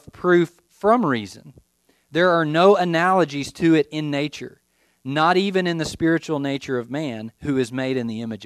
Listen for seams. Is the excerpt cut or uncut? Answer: uncut